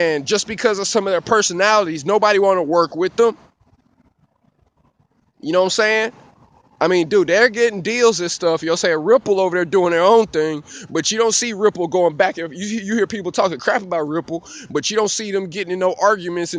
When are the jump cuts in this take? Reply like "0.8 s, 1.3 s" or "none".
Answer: none